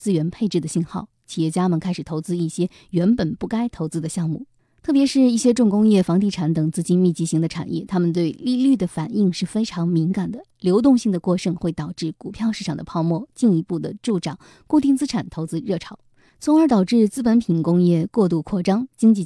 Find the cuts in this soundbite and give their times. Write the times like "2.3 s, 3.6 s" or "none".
none